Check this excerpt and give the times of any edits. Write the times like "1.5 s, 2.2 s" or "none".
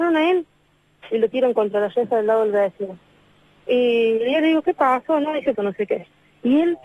5.5 s